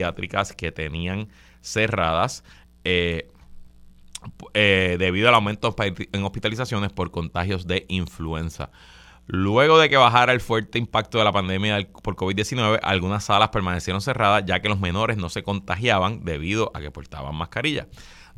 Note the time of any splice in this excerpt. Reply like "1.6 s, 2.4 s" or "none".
none